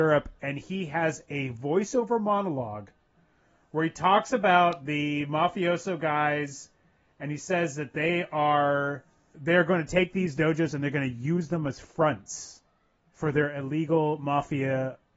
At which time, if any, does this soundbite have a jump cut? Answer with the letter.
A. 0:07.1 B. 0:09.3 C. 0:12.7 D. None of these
B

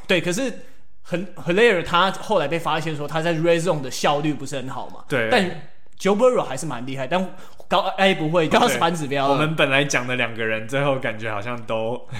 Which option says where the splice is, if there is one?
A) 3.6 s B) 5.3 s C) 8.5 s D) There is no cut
C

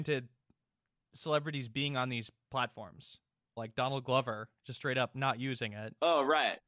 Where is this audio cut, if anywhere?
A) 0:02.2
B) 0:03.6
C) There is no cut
B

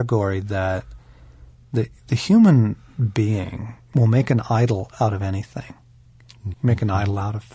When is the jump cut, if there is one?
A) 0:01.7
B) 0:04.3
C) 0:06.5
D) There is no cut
C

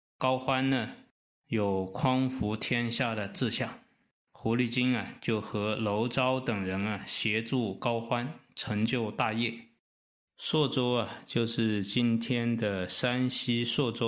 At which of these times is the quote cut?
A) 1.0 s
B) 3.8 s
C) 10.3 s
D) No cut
C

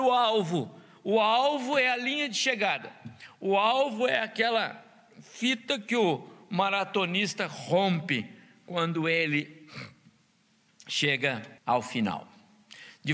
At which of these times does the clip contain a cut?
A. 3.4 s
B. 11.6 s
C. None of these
B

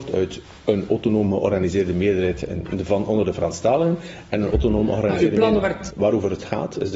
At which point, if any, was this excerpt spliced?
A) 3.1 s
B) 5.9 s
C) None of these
B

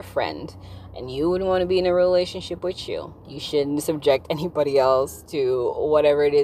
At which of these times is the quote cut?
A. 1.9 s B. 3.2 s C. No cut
B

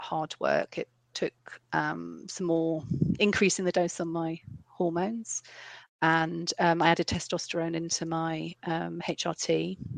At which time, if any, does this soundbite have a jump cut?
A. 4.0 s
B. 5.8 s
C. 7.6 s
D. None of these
B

